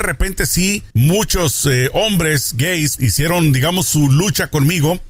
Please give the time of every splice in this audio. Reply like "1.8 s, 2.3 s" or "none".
0.9 s, 3.0 s

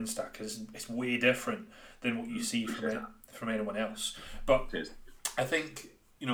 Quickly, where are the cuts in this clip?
none

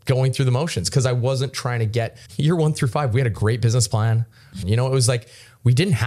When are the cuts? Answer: 2.3 s, 4.6 s

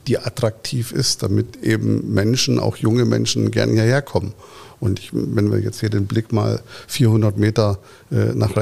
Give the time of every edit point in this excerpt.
none

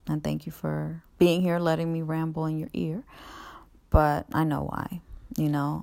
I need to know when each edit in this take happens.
1.1 s, 3.8 s

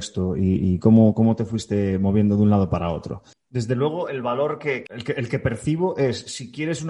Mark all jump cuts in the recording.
3.3 s, 4.9 s

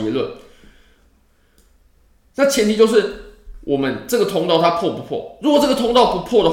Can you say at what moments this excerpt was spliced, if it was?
none

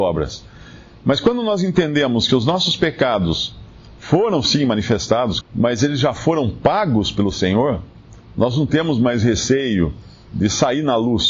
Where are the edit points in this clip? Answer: 5.4 s

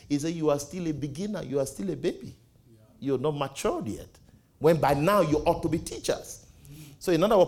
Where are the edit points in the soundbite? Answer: none

